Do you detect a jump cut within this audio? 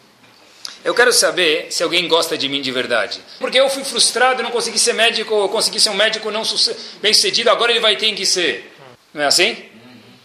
yes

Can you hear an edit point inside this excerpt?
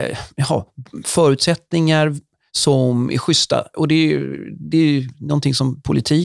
no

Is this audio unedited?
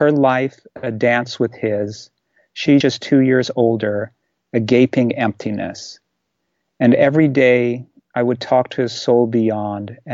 yes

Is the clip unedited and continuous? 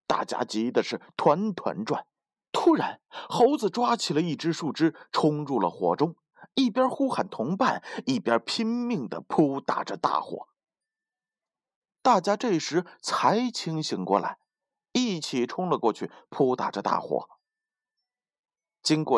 yes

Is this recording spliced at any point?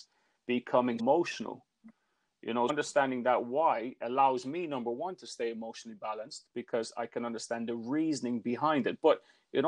yes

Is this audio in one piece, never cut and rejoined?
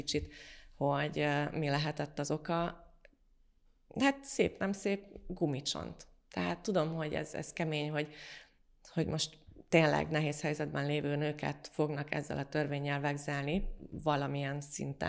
yes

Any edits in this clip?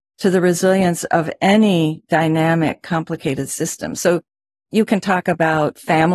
no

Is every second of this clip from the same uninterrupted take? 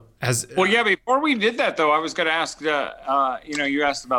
yes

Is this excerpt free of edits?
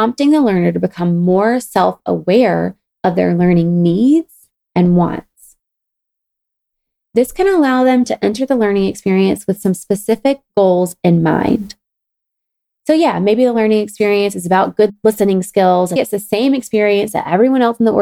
no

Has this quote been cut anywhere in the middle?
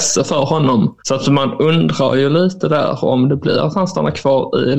yes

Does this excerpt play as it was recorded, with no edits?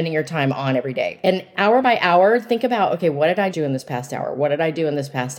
no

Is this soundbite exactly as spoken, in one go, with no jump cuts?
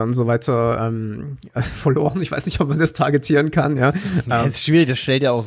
yes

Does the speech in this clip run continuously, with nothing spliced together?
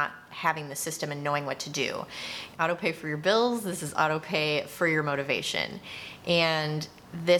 no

